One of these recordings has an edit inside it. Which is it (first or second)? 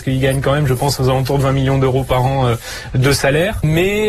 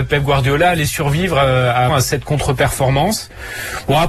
second